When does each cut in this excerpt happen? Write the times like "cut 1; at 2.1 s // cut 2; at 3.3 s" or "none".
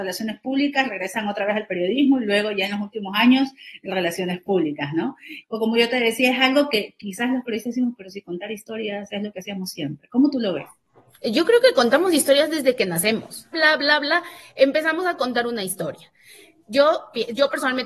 cut 1; at 5.4 s // cut 2; at 13.5 s